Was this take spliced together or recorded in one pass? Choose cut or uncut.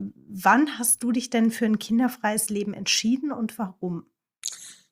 uncut